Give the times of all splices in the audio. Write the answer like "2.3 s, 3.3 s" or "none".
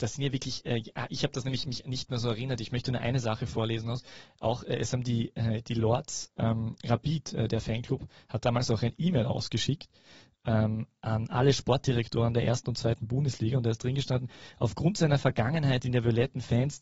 none